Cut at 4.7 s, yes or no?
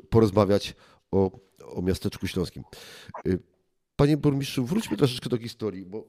no